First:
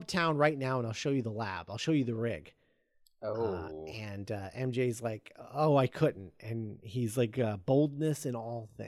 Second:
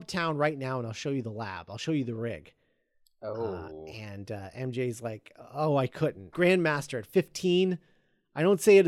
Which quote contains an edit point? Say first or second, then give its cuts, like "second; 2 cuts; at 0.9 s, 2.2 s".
second; 1 cut; at 6.3 s